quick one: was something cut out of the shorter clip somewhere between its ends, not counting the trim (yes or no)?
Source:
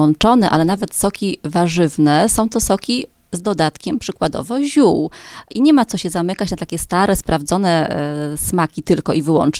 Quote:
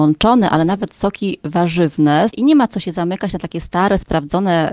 yes